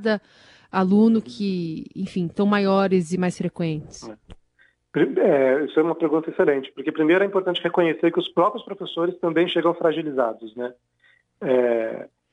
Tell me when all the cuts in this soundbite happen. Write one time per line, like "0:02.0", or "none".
none